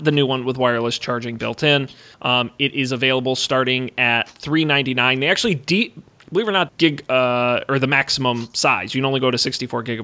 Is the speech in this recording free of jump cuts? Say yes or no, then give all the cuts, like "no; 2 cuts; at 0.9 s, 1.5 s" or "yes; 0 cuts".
no; 2 cuts; at 2.1 s, 6.7 s